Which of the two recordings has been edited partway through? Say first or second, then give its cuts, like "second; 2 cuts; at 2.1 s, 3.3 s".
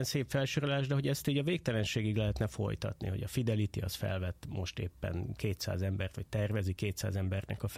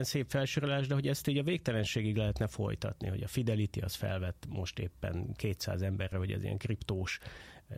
second; 1 cut; at 6.1 s